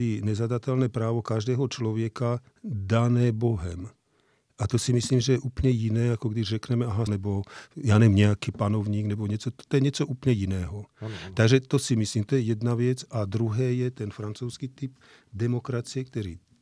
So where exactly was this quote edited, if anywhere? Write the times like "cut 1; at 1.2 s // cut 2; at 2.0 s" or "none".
cut 1; at 7.1 s